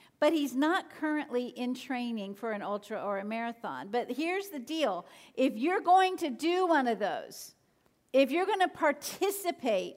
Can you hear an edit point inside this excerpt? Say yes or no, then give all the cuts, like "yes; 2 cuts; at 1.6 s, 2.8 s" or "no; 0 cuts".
no; 0 cuts